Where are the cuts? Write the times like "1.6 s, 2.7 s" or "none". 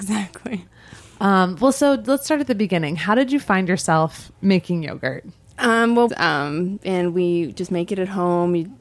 4.3 s, 6.1 s